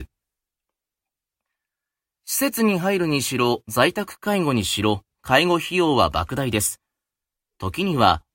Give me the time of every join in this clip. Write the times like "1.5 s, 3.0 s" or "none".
none